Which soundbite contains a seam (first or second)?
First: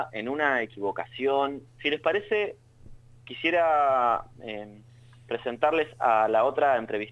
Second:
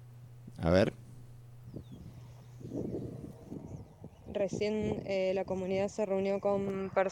first